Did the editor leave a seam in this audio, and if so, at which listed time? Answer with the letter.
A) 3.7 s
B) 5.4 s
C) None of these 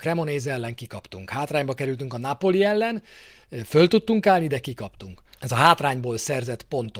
B